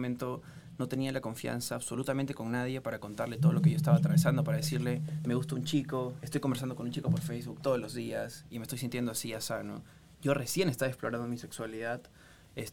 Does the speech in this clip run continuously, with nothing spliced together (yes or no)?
yes